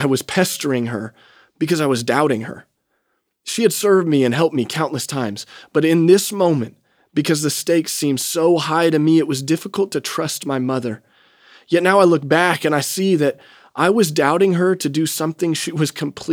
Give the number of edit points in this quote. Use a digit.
0